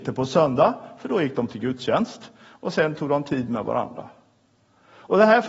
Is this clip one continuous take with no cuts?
yes; 0 cuts

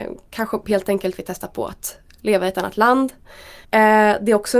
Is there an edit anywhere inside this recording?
yes; 1 cut; at 3.6 s

